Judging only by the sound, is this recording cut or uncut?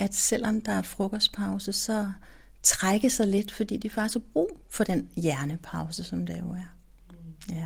uncut